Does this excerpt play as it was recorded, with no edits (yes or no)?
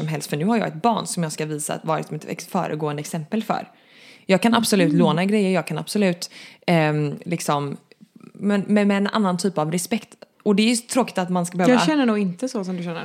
yes